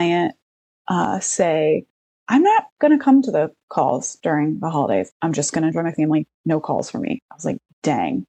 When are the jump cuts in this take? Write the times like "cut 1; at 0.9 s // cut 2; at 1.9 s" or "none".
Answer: cut 1; at 2.1 s // cut 2; at 5.1 s

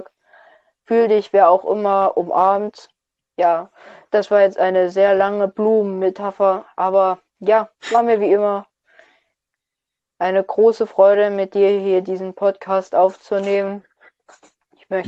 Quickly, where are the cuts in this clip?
cut 1; at 3.2 s

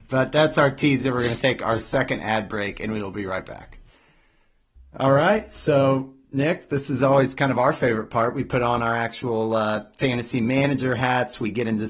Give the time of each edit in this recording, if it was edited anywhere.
none

